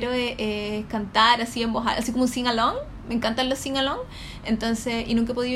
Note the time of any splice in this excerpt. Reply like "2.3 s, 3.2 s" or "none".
none